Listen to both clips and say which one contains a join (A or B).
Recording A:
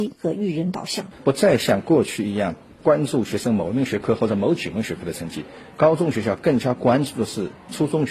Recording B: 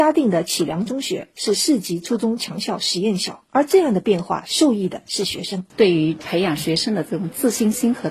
B